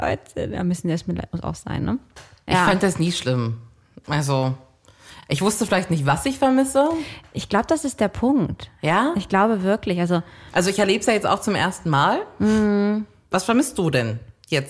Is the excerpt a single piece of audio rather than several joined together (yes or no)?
yes